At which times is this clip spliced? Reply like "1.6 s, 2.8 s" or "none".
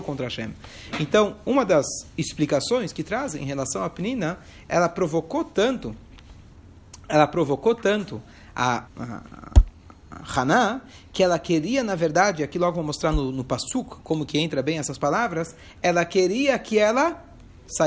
8.9 s